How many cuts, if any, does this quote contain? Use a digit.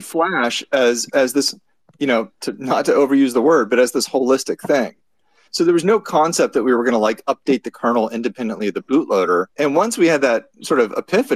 2